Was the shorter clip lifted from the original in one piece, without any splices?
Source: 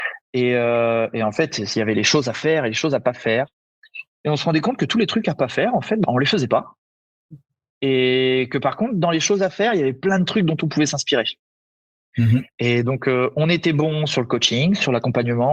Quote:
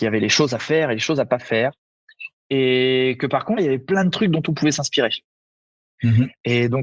no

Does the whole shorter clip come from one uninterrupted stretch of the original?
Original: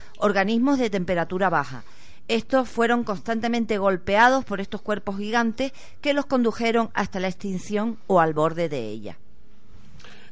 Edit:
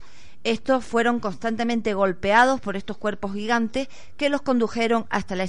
yes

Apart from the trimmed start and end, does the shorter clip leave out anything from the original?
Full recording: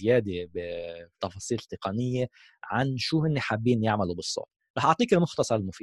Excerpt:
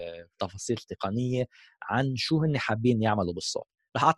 no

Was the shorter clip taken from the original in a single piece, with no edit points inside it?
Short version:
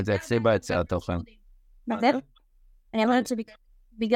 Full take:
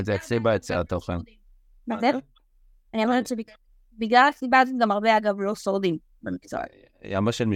yes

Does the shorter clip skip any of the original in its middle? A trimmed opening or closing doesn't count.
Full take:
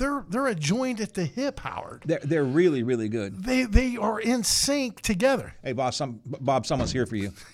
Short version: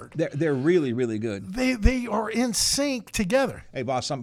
no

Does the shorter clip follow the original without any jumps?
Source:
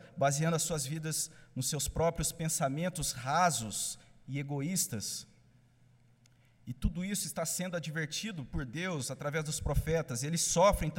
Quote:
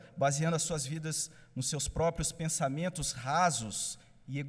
yes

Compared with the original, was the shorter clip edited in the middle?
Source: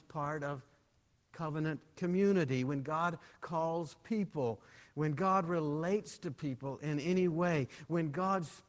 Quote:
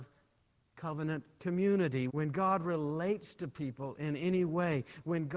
yes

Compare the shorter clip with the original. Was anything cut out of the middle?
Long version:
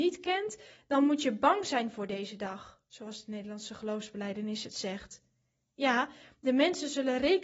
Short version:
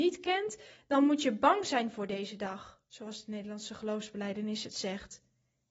no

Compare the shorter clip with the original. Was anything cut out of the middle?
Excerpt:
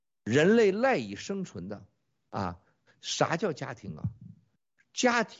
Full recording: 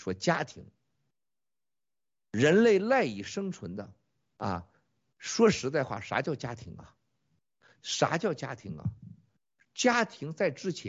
yes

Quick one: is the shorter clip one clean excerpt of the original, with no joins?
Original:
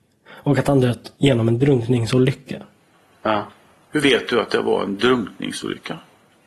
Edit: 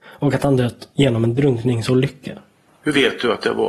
no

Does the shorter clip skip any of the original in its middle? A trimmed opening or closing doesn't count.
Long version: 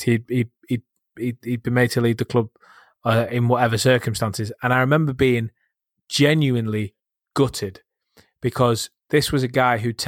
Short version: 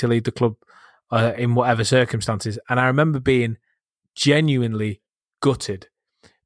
no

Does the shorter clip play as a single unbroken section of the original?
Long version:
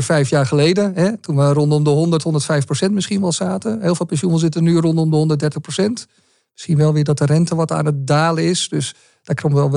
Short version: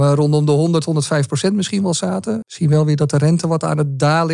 no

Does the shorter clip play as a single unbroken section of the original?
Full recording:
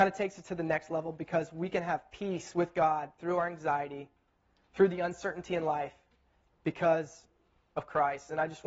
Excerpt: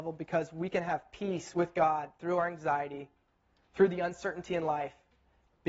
yes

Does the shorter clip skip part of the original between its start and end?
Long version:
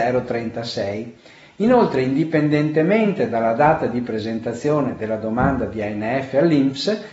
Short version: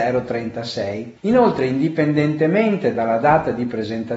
yes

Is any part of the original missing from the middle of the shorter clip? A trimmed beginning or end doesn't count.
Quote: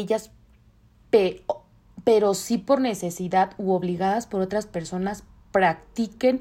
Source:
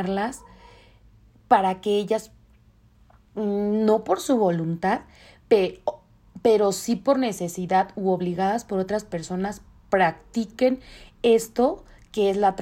yes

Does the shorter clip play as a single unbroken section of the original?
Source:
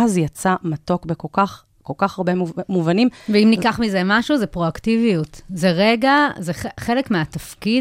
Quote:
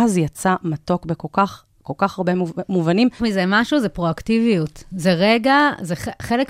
no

